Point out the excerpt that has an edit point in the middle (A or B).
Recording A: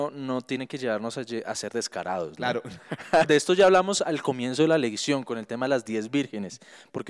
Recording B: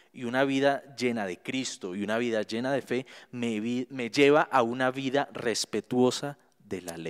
A